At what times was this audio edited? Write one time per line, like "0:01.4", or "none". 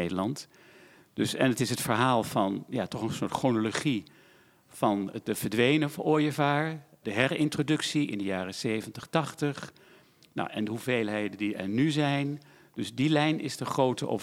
none